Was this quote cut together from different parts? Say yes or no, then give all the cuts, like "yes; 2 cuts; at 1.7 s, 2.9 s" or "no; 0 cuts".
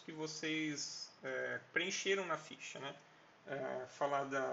yes; 1 cut; at 3.3 s